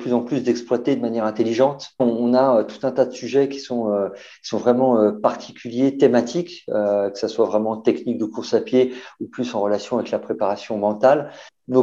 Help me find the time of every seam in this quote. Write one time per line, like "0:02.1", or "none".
none